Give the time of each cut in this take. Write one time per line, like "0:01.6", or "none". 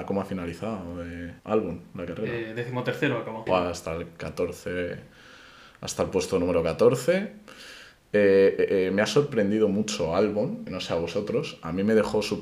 0:01.4
0:03.5
0:10.7